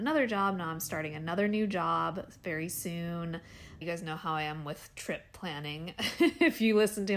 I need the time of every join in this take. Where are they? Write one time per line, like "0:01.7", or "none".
0:03.8